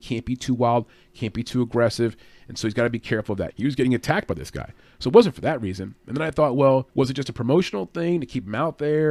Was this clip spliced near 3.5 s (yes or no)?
yes